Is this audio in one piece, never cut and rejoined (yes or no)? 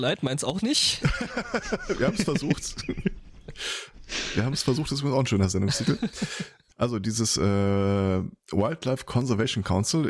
no